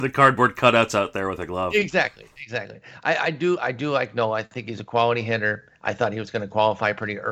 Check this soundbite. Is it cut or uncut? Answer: uncut